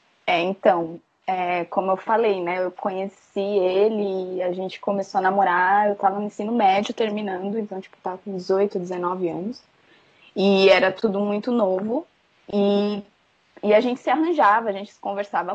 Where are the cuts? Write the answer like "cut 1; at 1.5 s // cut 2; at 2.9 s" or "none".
cut 1; at 12.4 s